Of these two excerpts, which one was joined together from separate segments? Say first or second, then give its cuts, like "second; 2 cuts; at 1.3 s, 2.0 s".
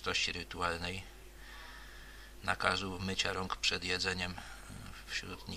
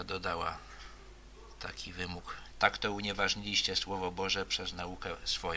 second; 1 cut; at 2.5 s